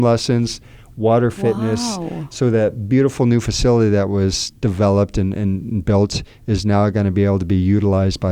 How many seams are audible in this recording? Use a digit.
0